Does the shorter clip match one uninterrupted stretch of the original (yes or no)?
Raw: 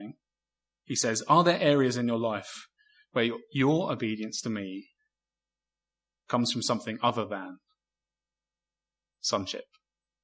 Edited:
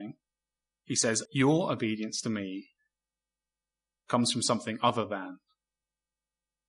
no